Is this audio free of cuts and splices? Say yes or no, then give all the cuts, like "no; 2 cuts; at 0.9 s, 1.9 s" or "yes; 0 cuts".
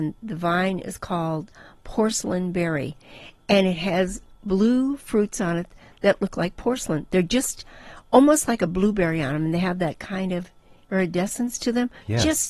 yes; 0 cuts